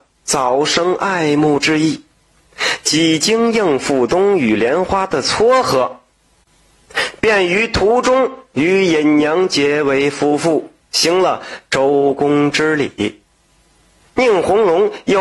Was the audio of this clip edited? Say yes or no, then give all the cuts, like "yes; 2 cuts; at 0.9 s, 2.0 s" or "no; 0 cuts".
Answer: no; 0 cuts